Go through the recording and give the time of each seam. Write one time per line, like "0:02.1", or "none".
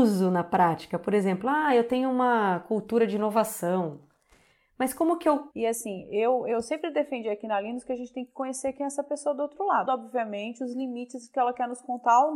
0:05.5
0:09.9